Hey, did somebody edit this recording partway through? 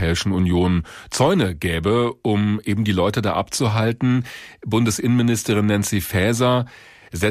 no; 0 cuts

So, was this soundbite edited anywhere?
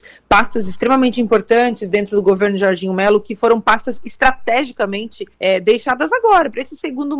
yes; 1 cut; at 5.3 s

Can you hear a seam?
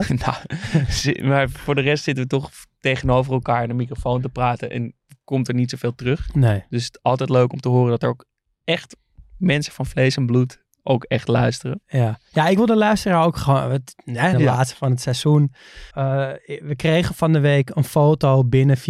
yes; 2 cuts; at 14.3 s, 15.9 s

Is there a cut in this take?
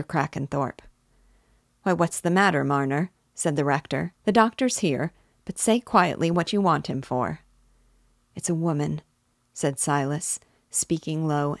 yes; 1 cut; at 4.2 s

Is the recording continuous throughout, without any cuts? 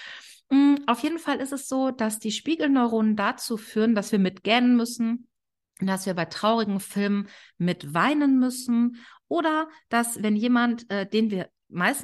yes; 0 cuts

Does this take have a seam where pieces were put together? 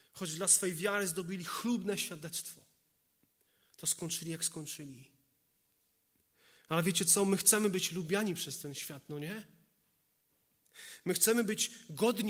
no; 0 cuts

